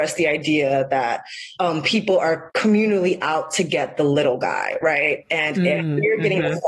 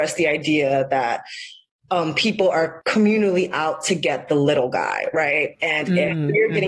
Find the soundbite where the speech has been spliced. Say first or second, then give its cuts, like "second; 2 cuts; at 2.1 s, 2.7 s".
first; 1 cut; at 1.6 s